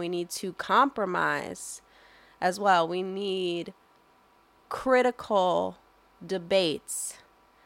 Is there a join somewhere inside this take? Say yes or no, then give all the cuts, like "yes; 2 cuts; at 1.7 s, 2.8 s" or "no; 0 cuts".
no; 0 cuts